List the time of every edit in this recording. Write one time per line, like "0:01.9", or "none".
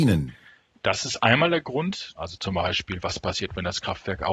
0:02.2